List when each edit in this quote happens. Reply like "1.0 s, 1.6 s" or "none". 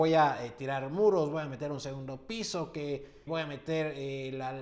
3.3 s